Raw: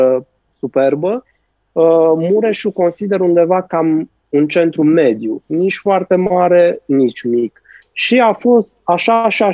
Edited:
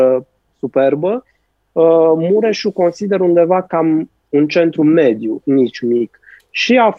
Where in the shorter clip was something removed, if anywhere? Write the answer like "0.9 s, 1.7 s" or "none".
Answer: 5.4 s